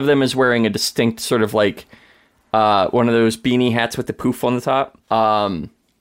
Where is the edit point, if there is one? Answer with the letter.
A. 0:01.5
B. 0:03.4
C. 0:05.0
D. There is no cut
C